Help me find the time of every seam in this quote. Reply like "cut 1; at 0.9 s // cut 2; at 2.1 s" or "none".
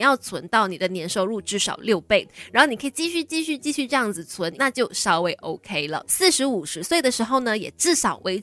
cut 1; at 4.5 s // cut 2; at 6.1 s